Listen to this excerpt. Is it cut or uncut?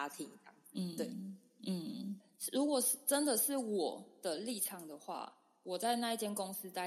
uncut